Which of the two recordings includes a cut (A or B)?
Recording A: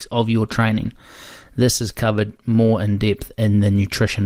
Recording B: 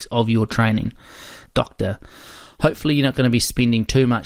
B